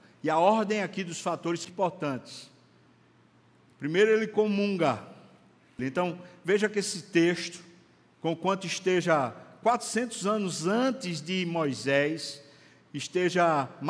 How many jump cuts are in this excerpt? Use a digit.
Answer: 2